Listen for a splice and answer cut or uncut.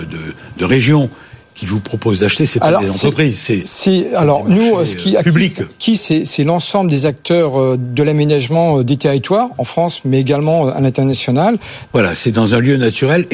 cut